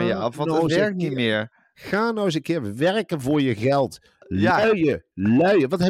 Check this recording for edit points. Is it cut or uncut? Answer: uncut